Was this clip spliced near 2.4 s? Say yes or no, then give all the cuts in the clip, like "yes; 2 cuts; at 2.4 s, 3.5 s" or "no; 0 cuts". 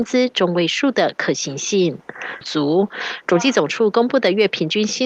yes; 1 cut; at 2.4 s